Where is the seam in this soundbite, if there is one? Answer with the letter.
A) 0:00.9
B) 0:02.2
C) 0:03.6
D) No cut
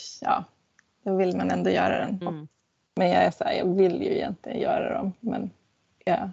B